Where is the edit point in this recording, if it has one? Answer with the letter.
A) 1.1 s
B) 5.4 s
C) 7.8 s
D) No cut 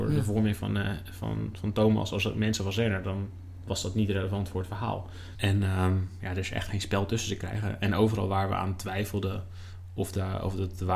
B